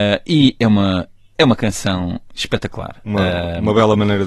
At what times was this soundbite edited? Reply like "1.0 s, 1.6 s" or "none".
none